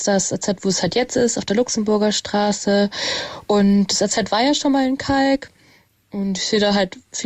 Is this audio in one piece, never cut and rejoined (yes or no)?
yes